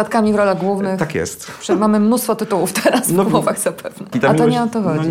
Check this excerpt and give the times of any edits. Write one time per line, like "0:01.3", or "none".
0:04.1